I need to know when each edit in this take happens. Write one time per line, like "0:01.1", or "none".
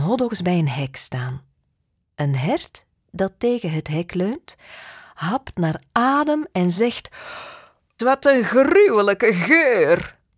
0:08.0